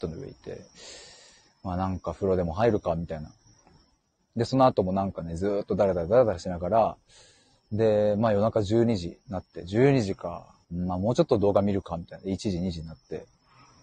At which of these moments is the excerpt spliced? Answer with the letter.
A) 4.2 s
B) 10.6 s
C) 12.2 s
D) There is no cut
B